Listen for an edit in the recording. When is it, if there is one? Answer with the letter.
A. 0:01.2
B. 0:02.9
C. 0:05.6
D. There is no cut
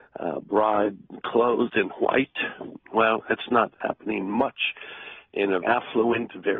C